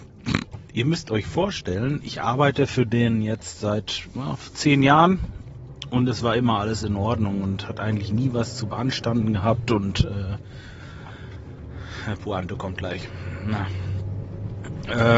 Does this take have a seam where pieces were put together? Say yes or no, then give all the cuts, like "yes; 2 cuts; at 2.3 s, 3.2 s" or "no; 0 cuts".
no; 0 cuts